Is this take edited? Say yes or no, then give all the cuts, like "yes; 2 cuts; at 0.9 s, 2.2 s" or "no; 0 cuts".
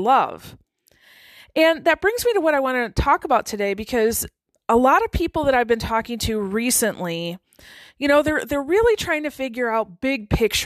no; 0 cuts